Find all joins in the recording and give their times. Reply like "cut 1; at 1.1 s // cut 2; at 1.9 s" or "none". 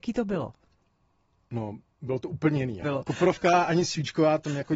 cut 1; at 2.8 s